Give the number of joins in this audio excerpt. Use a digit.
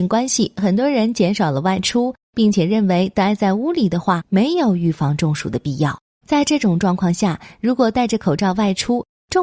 1